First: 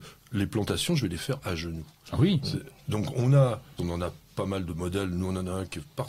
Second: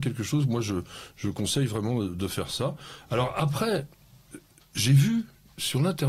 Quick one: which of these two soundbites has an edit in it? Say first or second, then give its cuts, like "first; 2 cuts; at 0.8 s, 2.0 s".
first; 1 cut; at 3.8 s